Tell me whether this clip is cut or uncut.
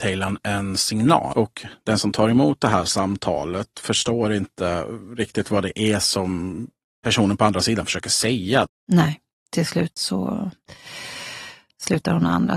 cut